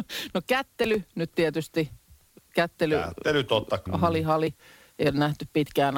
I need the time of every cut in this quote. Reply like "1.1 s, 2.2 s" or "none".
3.9 s